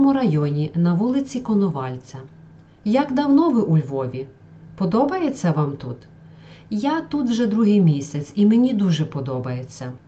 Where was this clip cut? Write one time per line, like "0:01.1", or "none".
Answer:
none